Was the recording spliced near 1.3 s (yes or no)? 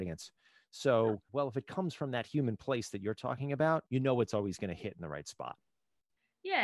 yes